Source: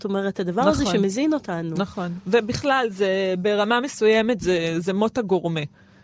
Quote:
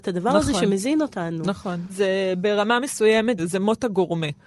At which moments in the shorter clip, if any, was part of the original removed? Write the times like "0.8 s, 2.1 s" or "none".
1.9 s, 3.4 s